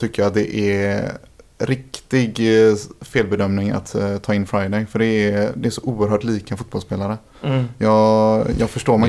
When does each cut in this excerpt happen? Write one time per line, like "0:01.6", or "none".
none